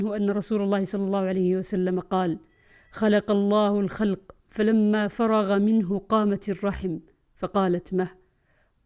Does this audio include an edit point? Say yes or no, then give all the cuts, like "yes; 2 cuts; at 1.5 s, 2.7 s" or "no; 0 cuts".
yes; 1 cut; at 4.4 s